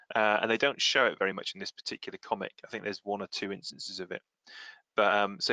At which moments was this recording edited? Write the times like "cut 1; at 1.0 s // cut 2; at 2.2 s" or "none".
none